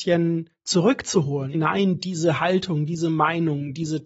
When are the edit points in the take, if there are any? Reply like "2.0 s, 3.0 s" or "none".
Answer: 1.5 s

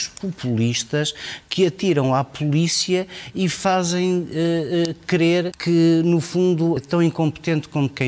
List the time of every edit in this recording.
5.5 s, 6.8 s

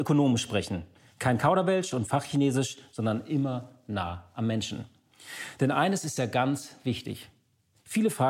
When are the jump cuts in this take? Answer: none

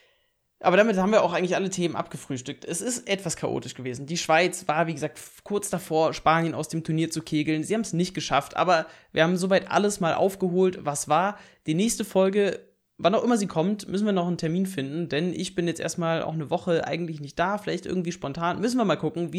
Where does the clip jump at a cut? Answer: none

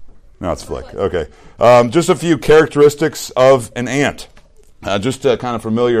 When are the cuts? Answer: none

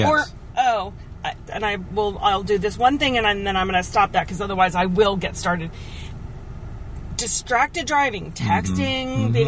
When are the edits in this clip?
1.5 s

